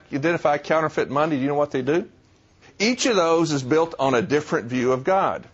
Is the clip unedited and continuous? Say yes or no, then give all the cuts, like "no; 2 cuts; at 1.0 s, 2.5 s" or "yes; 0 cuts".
no; 1 cut; at 2.6 s